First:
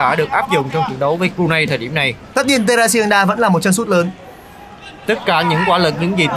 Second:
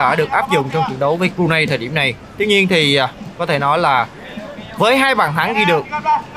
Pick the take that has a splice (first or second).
first